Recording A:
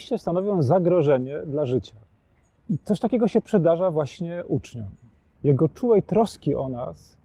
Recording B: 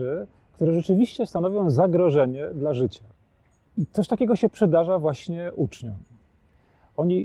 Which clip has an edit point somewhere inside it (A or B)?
A